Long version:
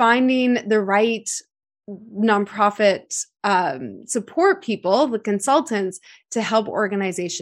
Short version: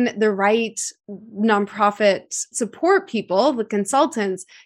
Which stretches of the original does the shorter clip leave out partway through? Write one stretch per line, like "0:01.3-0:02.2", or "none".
0:01.5-0:01.8
0:03.3-0:04.1